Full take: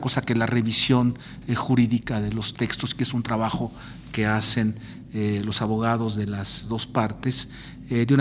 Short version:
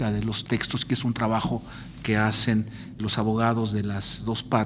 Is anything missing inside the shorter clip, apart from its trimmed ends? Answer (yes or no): yes